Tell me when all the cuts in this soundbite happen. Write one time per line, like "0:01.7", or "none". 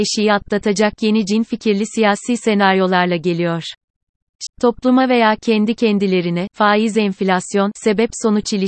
0:04.5
0:06.5